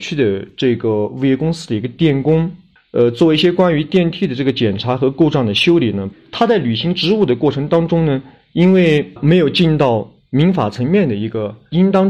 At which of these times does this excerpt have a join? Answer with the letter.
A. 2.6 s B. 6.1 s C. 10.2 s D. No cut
B